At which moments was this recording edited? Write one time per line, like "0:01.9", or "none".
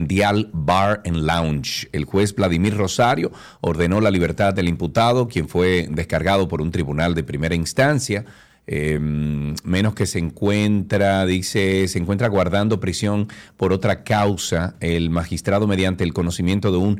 none